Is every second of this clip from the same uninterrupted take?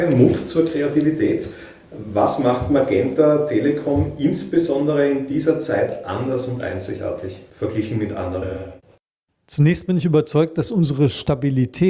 yes; 0 cuts

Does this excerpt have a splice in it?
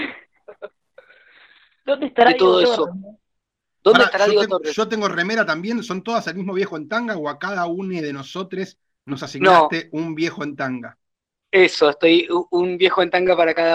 no; 0 cuts

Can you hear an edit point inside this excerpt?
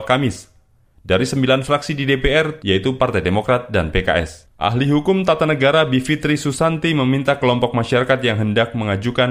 yes; 2 cuts; at 2.6 s, 4.5 s

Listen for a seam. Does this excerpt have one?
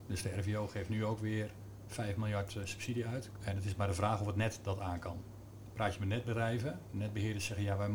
yes; 1 cut; at 3.3 s

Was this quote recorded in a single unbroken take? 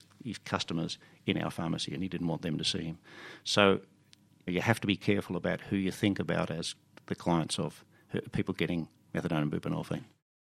no; 1 cut; at 4.5 s

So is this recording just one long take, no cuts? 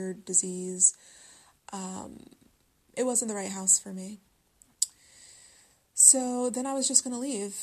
yes; 0 cuts

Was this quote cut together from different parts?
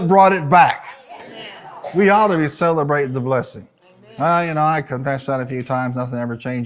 no; 0 cuts

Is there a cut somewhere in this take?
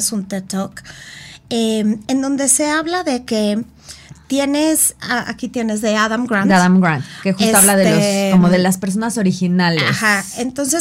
no; 0 cuts

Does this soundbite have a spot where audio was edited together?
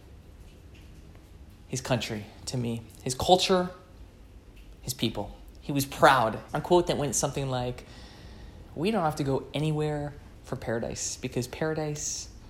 yes; 2 cuts; at 6.5 s, 8.6 s

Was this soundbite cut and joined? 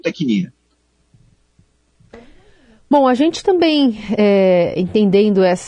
no; 0 cuts

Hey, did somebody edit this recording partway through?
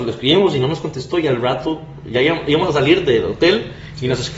no; 0 cuts

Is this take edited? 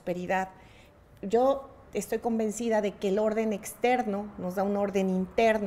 yes; 1 cut; at 1.9 s

